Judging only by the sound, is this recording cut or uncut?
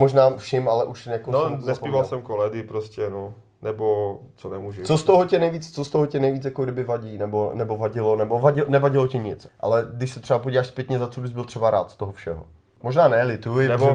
cut